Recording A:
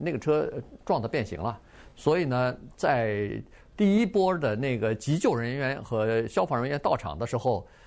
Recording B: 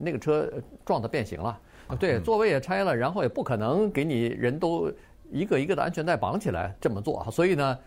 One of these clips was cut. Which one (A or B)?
B